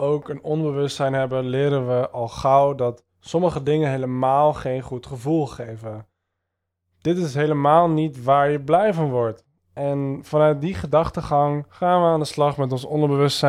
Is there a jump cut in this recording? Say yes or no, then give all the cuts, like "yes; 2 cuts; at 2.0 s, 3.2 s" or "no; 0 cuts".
no; 0 cuts